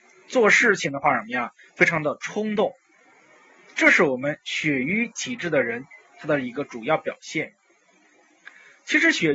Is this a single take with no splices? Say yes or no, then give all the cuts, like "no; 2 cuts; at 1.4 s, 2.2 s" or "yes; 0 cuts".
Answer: yes; 0 cuts